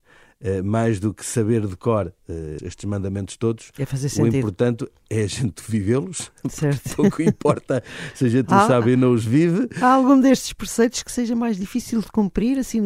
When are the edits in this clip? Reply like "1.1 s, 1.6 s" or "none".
2.6 s